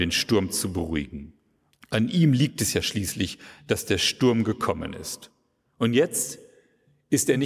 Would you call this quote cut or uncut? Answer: cut